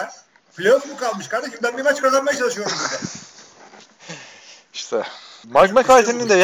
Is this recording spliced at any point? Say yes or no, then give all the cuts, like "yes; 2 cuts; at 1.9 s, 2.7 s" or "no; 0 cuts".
yes; 1 cut; at 5.4 s